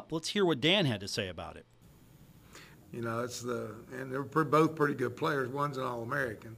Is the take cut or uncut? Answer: cut